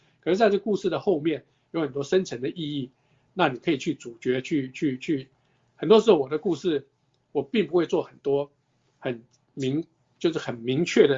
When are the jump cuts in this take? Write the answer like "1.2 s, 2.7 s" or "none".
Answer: none